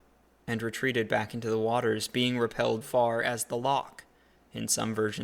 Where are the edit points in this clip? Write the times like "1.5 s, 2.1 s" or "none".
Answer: 2.8 s